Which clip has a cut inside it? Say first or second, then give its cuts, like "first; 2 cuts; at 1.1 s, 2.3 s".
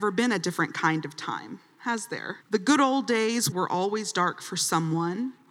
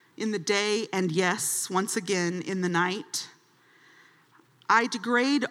first; 2 cuts; at 2.4 s, 3.5 s